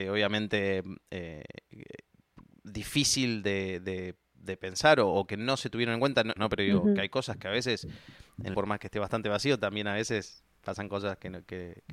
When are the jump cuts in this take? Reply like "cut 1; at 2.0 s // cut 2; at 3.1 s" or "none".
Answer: cut 1; at 6.4 s // cut 2; at 8.5 s